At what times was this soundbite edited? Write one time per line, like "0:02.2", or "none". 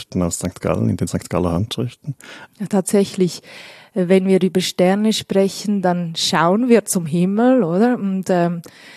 0:02.5